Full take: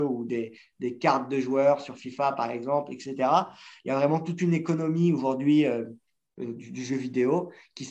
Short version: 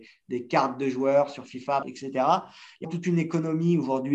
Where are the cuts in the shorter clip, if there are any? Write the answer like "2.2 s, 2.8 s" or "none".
1.8 s, 2.8 s